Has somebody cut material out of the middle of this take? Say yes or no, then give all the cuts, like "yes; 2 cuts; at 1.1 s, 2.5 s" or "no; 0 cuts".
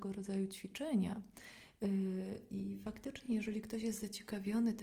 no; 0 cuts